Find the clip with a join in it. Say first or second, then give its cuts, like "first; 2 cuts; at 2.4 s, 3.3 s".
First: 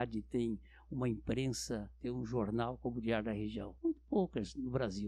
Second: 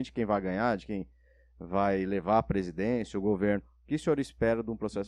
first; 1 cut; at 3.8 s